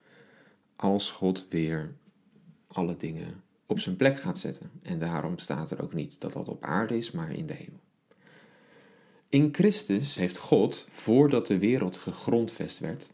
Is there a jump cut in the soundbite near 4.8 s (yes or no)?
no